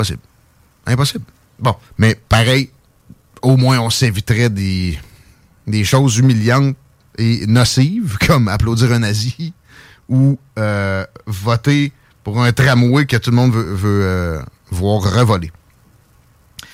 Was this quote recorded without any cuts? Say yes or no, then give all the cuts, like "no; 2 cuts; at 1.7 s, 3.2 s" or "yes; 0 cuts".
no; 1 cut; at 1.4 s